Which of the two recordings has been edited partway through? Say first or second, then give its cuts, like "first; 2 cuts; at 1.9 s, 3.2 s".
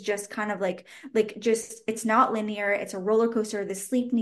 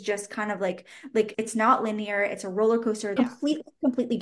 second; 2 cuts; at 1.3 s, 3.2 s